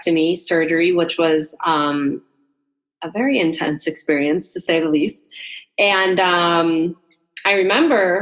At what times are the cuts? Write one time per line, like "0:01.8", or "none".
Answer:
none